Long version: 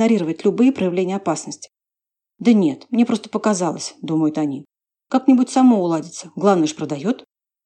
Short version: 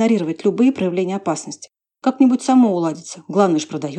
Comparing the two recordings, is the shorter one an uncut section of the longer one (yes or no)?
no